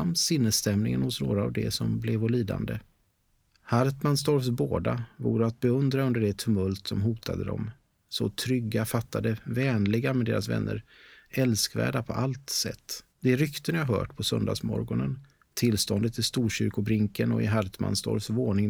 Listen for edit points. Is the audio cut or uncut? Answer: cut